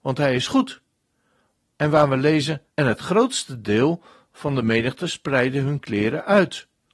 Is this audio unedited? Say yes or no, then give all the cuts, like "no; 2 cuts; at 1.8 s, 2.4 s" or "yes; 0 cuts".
no; 2 cuts; at 1.6 s, 2.7 s